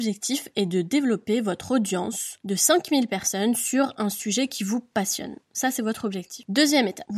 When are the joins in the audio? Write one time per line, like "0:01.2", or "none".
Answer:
none